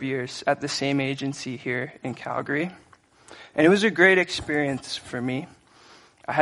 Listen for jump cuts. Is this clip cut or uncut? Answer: uncut